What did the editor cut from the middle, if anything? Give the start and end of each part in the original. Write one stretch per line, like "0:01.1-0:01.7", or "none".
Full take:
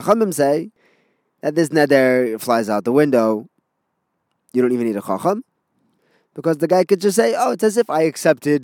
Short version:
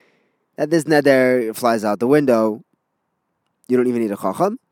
none